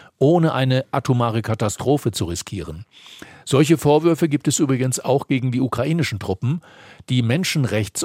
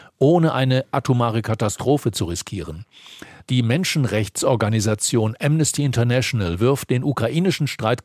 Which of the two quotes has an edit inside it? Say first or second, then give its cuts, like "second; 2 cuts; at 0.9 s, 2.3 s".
second; 1 cut; at 3.4 s